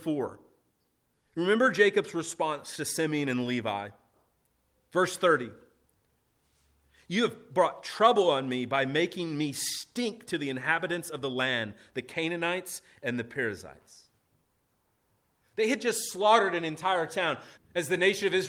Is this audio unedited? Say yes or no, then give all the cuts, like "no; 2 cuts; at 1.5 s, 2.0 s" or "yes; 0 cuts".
no; 1 cut; at 17.6 s